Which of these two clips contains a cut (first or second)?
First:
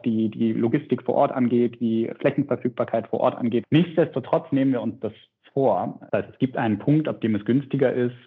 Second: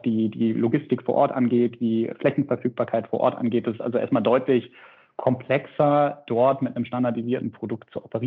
first